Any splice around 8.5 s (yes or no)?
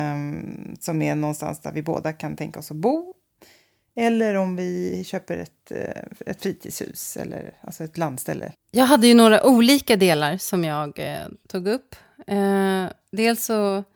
yes